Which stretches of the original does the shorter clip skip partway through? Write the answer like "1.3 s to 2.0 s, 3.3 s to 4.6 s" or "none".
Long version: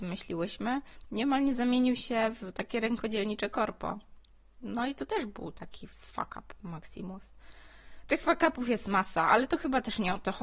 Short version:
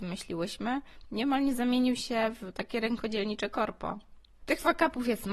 4.4 s to 8.0 s